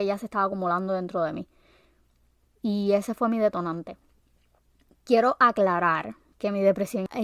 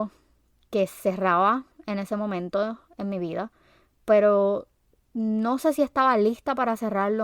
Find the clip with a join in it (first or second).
first